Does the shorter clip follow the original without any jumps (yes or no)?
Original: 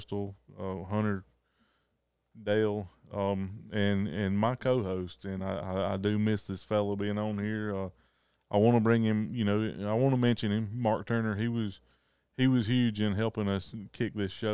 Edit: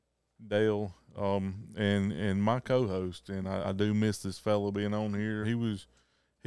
no